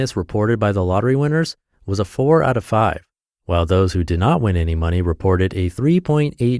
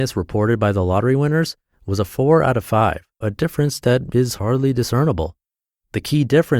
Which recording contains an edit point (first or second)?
second